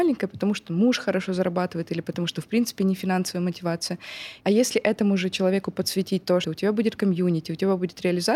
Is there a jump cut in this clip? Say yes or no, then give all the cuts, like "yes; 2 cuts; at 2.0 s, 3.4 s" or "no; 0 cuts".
yes; 2 cuts; at 4.4 s, 6.4 s